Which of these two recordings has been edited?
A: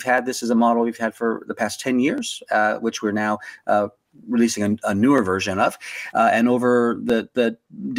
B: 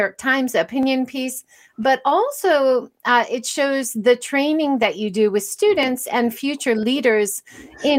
A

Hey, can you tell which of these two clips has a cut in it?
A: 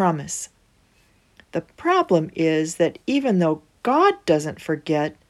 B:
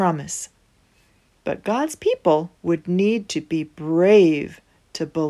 B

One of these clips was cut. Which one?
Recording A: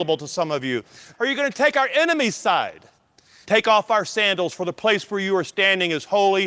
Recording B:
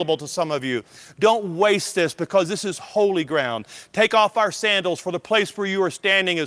A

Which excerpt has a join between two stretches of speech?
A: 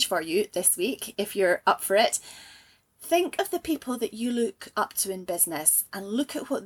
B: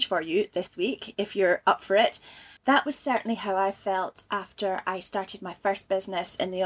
B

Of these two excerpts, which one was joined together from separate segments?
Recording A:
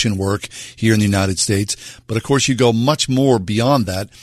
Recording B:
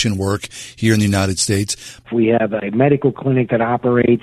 B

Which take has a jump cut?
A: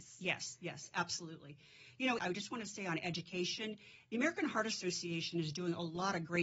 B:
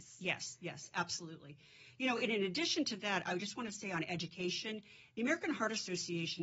A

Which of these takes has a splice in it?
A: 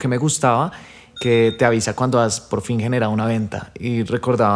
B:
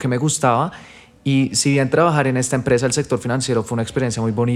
A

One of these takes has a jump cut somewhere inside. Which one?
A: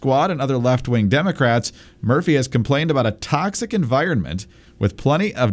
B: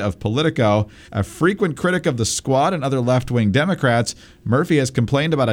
B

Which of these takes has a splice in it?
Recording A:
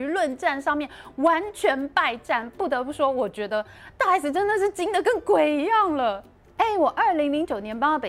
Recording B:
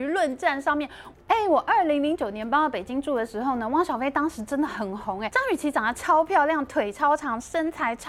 B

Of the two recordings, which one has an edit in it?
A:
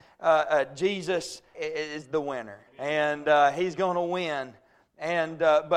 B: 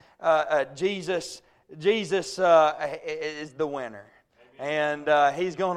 A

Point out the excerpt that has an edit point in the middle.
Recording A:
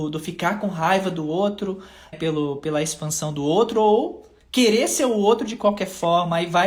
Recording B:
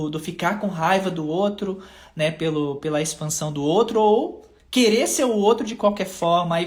A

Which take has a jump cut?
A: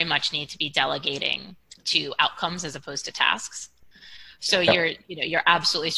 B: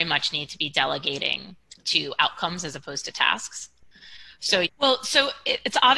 B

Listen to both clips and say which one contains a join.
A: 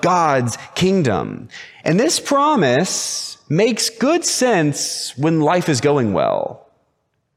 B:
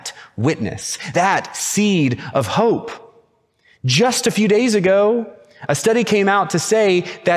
B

